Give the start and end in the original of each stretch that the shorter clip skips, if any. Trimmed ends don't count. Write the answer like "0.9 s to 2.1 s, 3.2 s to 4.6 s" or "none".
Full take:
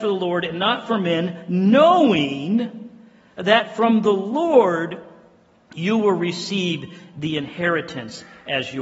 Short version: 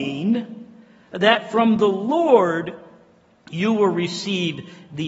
none